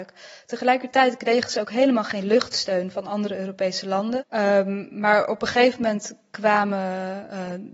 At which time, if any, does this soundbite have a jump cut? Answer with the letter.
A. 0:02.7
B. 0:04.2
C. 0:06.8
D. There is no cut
B